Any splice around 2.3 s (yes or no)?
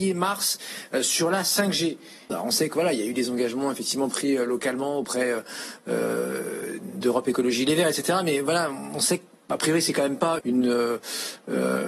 yes